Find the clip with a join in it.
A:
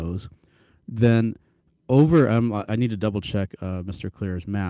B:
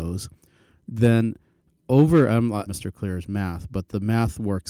B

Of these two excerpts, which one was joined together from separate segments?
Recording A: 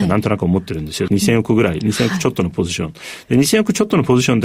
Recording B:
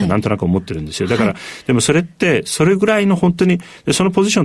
A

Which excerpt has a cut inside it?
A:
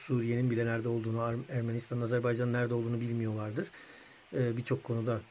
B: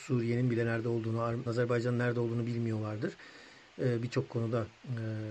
B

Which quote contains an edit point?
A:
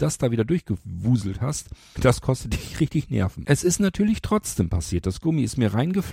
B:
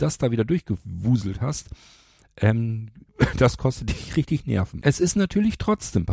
A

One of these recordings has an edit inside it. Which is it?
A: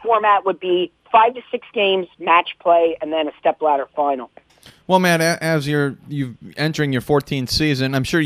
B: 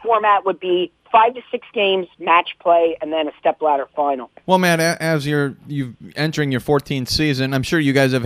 B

